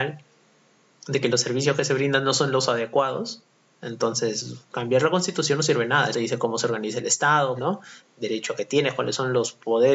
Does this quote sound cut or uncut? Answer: cut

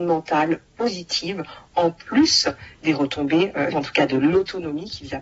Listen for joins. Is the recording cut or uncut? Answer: cut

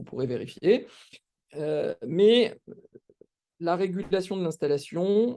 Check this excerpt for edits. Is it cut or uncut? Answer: cut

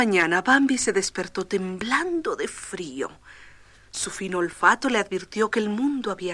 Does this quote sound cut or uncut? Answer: uncut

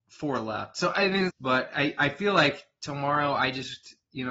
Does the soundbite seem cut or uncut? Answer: cut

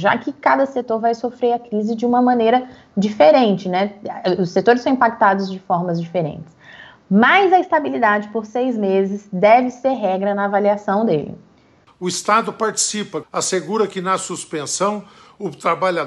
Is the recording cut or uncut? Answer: cut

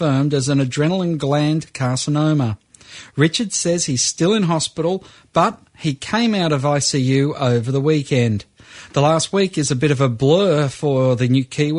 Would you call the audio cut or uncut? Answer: uncut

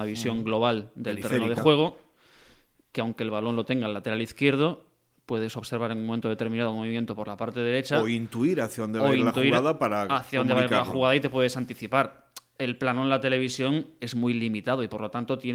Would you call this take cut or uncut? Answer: uncut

